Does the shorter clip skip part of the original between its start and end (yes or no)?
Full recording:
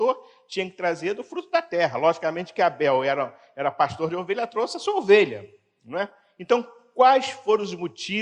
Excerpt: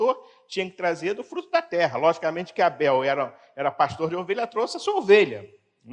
no